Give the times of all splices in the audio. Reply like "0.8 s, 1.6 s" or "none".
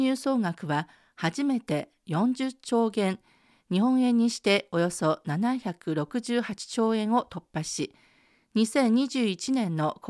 none